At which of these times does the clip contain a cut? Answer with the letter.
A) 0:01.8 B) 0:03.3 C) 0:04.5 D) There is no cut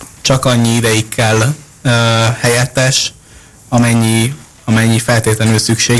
D